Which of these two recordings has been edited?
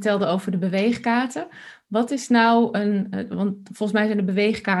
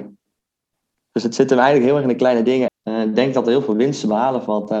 second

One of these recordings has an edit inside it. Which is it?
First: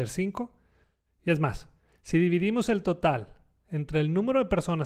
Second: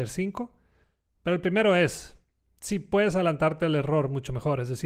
first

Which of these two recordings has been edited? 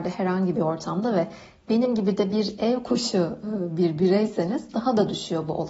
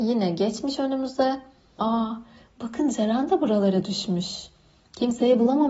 second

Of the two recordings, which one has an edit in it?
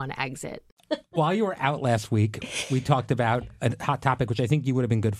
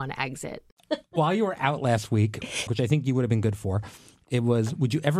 second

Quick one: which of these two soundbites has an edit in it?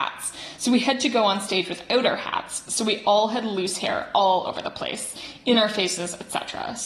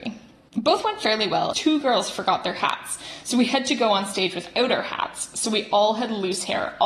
second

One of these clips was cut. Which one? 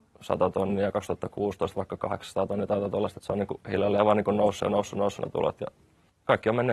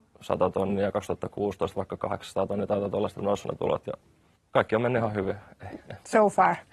second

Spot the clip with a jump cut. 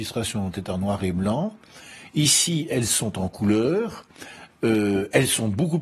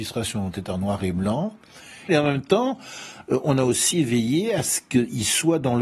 second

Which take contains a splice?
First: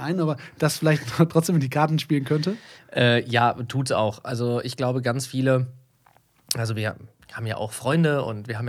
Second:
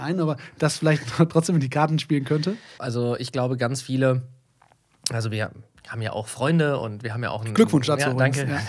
second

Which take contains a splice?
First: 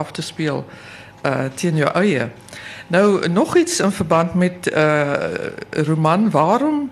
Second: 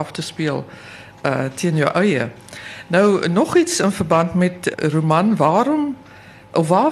second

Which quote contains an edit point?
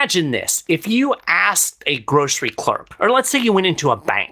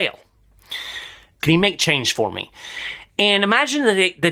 second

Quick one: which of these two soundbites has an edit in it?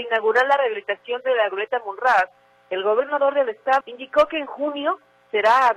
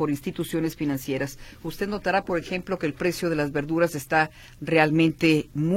first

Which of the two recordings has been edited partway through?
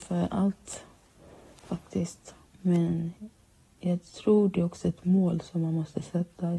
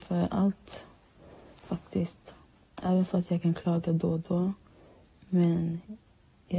first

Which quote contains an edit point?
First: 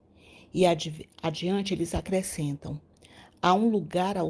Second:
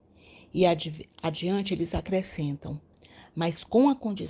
second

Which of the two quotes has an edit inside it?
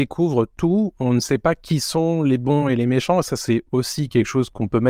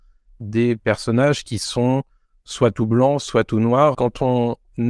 second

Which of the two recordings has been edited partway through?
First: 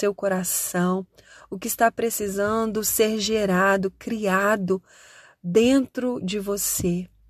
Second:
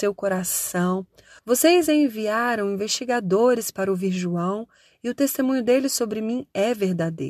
second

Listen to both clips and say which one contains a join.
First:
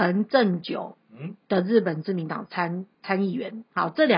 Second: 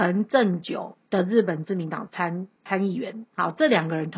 second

